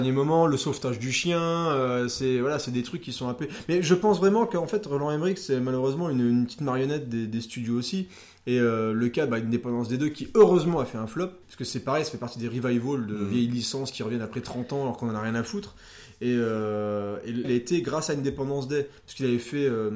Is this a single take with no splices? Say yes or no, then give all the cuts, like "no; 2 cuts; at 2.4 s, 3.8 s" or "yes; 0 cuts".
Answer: no; 2 cuts; at 11.4 s, 17.4 s